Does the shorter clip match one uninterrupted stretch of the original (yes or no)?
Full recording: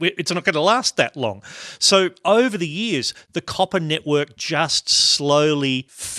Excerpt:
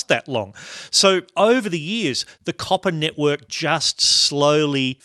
yes